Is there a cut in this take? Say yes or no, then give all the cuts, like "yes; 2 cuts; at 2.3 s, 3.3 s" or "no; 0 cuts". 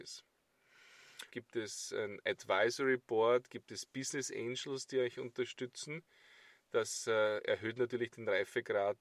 yes; 1 cut; at 1.3 s